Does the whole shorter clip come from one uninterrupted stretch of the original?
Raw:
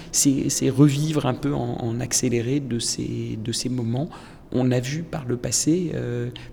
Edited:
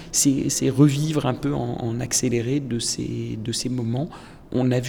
yes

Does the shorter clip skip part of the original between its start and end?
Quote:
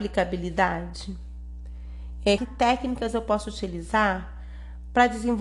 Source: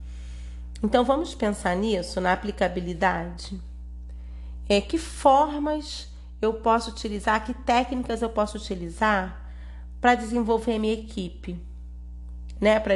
yes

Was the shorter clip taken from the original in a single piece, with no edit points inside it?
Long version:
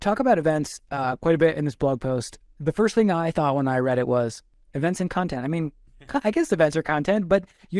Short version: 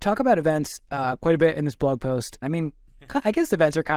no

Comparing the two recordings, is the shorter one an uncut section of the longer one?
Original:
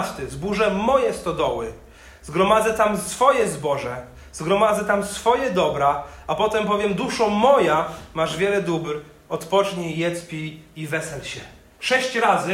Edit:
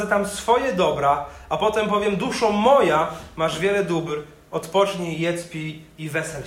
yes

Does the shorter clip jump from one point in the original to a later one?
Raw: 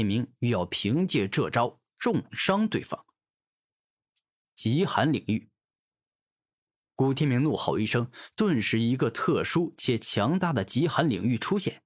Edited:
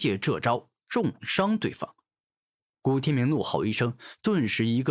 yes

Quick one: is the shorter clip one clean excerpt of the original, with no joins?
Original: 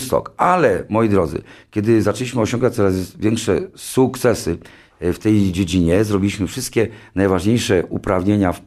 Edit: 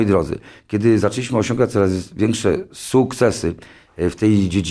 yes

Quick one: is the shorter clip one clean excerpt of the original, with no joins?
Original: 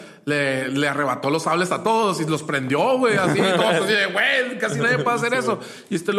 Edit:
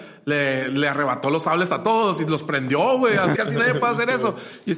no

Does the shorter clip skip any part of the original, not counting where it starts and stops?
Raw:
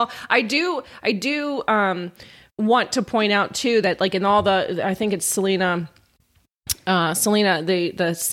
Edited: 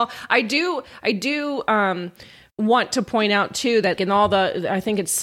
yes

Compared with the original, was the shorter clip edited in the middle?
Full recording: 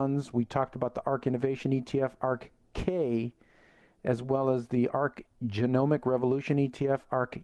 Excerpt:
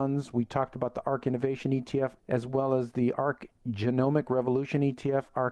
yes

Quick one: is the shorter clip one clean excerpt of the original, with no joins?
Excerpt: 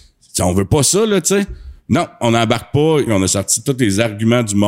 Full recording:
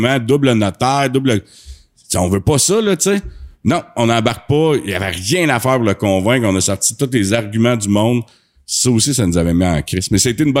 no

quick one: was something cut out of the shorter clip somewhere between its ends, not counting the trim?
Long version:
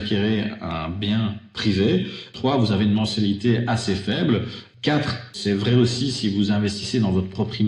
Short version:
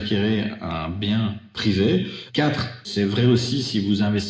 yes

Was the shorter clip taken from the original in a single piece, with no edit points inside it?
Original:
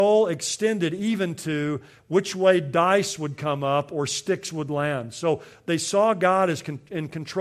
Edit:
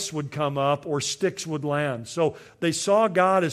yes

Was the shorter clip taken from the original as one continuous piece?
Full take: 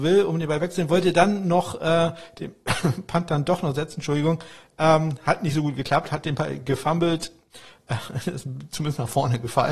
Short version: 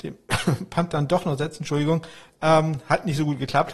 yes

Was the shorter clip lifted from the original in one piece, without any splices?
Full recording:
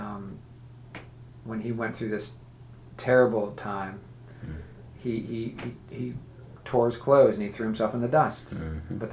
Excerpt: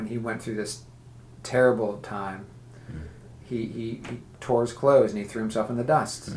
no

